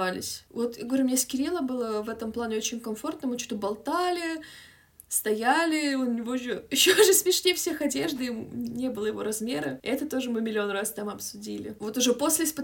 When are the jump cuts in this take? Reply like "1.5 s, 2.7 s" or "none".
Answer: none